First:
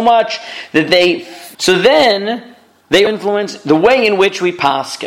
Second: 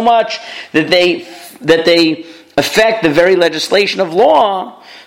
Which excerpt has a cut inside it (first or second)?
first